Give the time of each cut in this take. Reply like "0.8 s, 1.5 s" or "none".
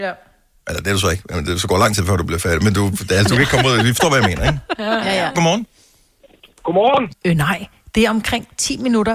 5.3 s, 7.1 s